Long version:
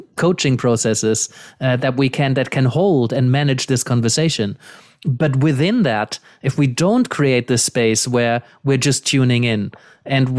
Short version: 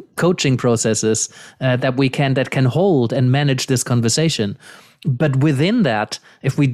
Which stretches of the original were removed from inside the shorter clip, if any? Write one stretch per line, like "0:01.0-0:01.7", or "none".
none